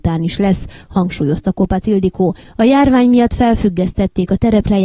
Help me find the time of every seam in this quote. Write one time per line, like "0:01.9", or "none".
0:02.4